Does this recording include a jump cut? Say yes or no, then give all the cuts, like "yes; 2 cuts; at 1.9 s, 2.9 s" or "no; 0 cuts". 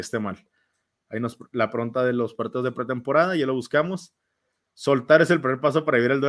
no; 0 cuts